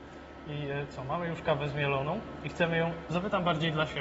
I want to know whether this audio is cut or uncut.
uncut